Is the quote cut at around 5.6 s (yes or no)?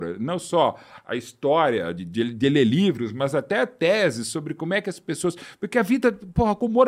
no